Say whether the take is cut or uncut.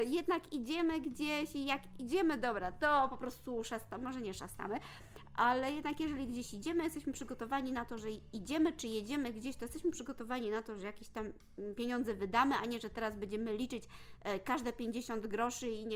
uncut